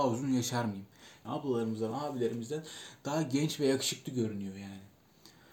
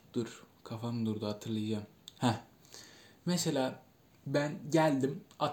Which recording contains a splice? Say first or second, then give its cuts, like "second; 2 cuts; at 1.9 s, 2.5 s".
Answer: first; 1 cut; at 1.2 s